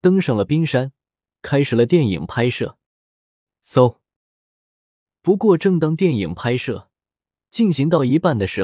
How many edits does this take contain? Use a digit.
0